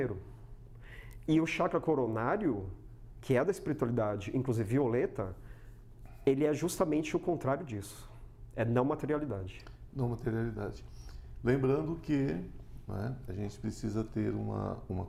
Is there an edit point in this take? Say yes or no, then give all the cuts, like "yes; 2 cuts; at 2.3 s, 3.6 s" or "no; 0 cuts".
no; 0 cuts